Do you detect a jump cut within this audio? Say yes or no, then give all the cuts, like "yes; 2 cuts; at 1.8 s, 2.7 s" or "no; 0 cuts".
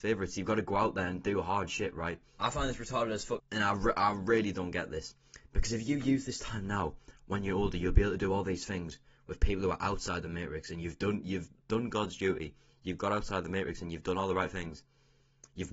yes; 2 cuts; at 2.4 s, 3.4 s